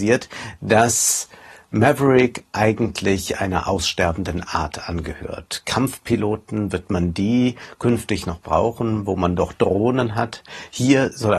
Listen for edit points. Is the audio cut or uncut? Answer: uncut